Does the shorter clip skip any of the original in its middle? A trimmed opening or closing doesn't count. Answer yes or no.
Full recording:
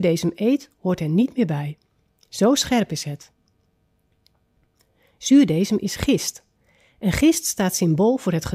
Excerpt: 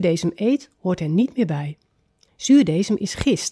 yes